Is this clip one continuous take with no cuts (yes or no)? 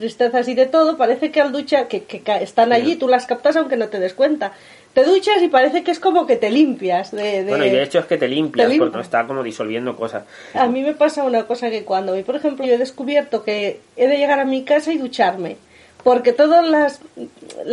no